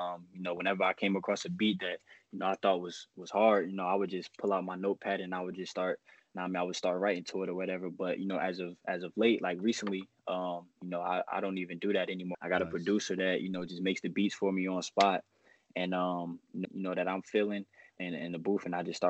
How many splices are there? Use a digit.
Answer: 3